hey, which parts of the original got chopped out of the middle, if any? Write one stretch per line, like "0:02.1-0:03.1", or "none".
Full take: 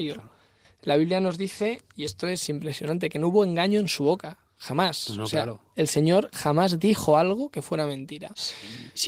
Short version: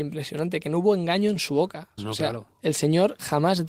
0:04.5-0:05.1